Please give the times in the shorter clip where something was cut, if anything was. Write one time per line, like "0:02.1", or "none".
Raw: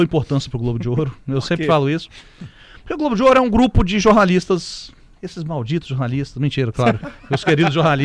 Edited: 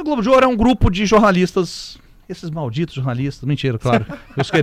none